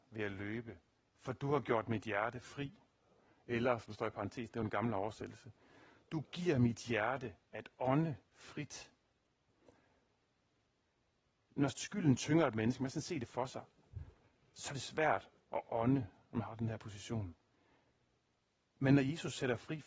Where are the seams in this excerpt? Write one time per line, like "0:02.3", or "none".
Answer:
none